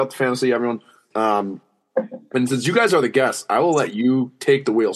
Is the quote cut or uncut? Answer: cut